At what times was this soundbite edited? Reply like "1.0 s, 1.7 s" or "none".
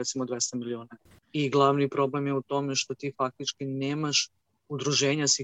none